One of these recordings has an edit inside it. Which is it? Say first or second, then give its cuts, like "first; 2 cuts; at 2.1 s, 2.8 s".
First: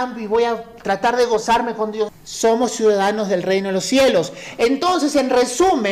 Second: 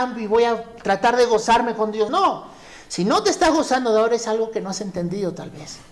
first; 1 cut; at 2.1 s